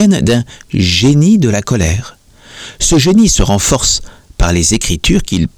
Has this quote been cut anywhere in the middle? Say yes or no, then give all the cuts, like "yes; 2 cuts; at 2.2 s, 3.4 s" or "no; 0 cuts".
no; 0 cuts